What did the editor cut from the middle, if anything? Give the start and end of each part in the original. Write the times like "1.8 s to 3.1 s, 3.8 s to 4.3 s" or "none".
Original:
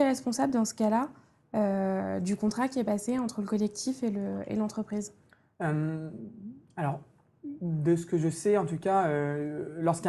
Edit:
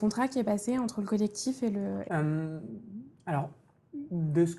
4.5 s to 5.6 s